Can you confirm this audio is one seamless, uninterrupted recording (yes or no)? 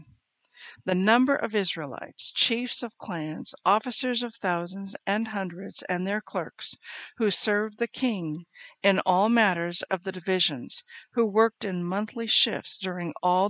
yes